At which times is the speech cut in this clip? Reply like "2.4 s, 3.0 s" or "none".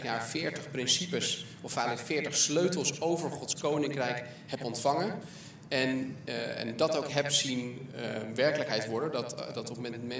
none